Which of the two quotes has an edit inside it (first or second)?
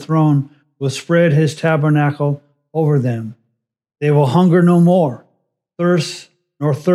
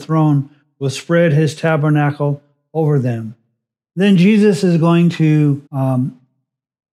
second